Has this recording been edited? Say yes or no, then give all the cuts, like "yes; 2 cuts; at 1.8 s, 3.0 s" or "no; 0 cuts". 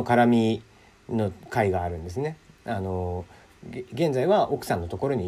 no; 0 cuts